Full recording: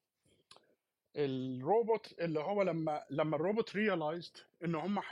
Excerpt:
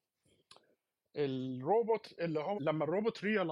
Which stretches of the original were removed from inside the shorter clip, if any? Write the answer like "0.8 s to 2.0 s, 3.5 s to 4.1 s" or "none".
2.5 s to 3.1 s